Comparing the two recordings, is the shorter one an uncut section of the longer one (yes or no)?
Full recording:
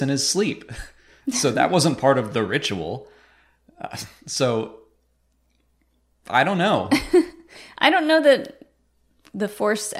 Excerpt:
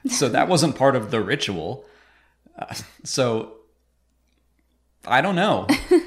yes